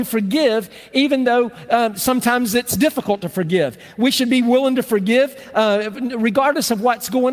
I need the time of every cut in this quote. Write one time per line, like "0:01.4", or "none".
none